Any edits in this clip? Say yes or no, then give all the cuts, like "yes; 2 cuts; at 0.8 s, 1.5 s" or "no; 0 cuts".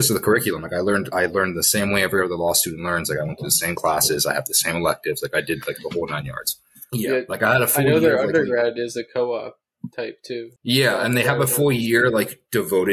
yes; 2 cuts; at 6.9 s, 10.6 s